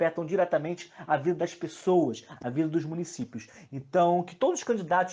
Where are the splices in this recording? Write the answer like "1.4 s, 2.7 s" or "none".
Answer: 2.4 s